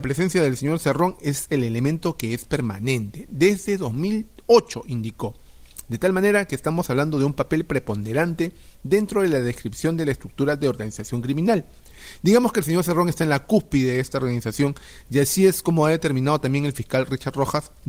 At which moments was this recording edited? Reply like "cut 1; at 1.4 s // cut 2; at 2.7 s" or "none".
none